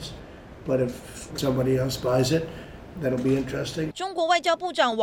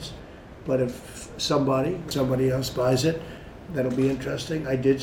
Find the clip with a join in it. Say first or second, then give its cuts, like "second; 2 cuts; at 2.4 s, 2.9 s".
first; 2 cuts; at 1.3 s, 3.9 s